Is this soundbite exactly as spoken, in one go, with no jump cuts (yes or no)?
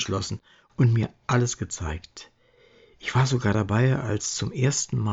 yes